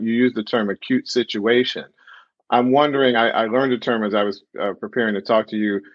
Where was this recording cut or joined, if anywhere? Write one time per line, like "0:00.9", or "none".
none

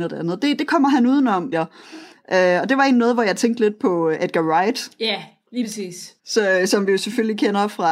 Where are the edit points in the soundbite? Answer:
0:01.5
0:06.2

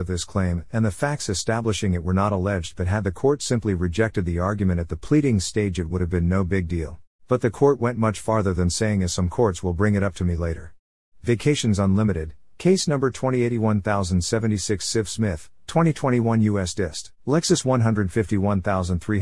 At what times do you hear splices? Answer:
0:07.1
0:11.1
0:17.1

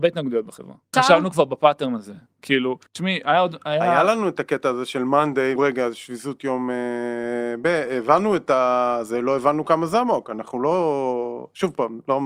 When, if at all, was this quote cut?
0:00.9
0:02.9
0:05.6

